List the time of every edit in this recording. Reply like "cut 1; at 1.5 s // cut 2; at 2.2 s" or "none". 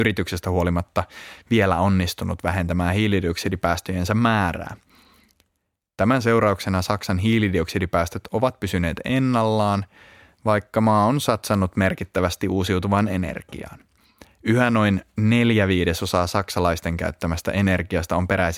cut 1; at 5.9 s